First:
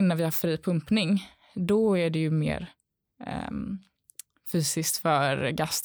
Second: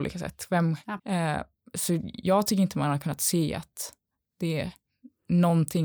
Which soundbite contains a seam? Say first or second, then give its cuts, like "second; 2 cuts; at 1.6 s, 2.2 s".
second; 1 cut; at 1.0 s